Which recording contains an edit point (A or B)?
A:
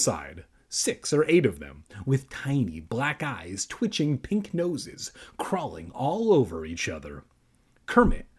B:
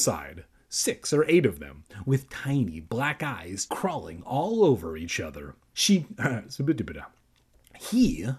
B